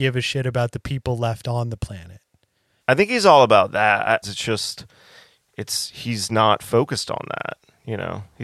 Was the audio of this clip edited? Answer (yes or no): yes